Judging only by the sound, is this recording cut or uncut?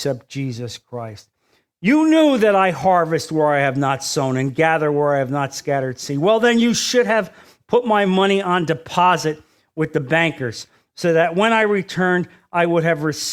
uncut